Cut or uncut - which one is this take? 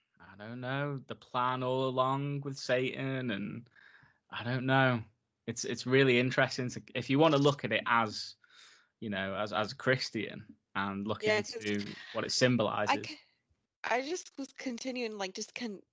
uncut